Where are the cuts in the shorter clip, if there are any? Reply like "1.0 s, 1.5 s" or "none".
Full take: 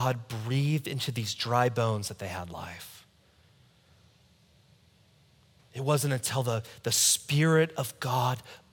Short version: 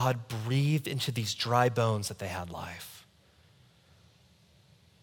none